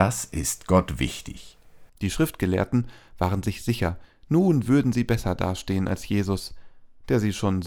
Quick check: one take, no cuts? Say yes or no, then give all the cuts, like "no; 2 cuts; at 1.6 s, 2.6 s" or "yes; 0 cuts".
no; 1 cut; at 1.9 s